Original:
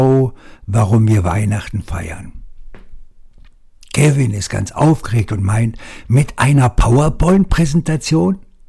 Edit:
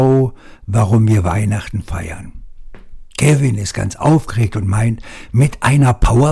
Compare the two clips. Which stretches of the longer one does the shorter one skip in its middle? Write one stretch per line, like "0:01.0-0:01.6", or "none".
0:03.1-0:03.9

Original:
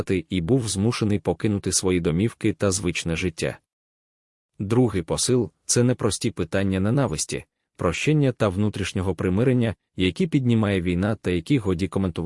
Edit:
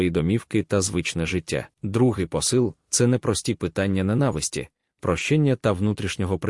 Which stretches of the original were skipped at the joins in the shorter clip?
0:03.6-0:04.5

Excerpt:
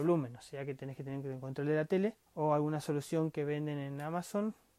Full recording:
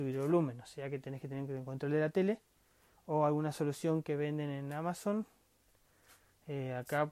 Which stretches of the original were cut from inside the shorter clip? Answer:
0:02.5-0:03.0

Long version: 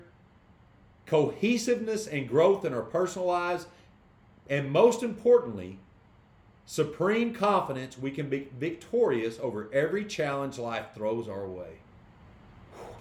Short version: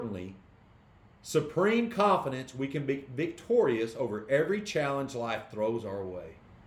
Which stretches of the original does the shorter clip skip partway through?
none

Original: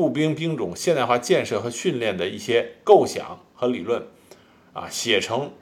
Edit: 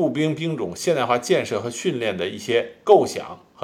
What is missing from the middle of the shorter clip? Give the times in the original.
none

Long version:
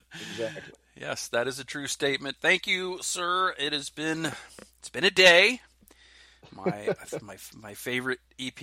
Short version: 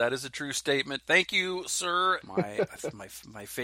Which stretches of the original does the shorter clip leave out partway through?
0:03.5-0:06.5

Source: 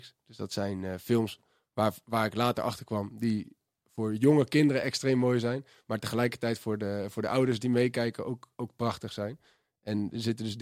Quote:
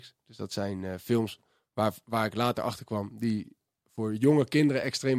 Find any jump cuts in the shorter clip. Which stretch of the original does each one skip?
none

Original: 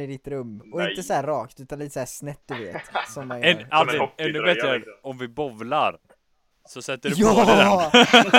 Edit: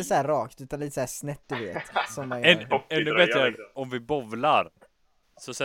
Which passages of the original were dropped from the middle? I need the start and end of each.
0:03.7-0:04.0

